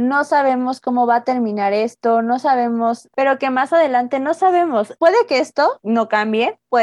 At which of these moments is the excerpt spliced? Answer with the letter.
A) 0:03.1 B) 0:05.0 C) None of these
A